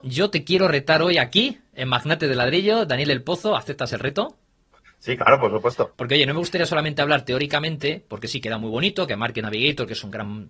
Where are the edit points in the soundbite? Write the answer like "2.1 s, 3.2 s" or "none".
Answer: 5.9 s